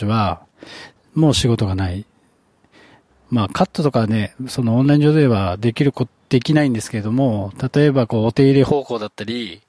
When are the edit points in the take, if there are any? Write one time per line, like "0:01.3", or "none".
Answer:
0:03.1